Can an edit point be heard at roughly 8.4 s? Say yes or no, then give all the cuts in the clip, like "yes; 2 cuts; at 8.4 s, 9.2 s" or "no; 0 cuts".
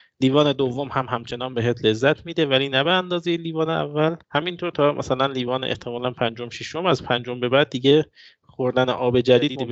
no; 1 cut; at 4.2 s